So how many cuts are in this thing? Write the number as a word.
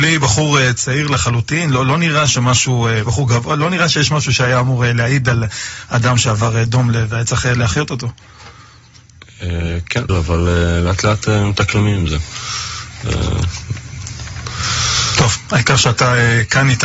two